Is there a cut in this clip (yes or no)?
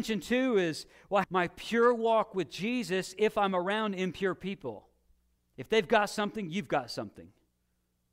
yes